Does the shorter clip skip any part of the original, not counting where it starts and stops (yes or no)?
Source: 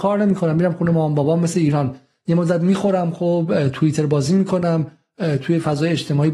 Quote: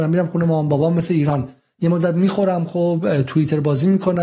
no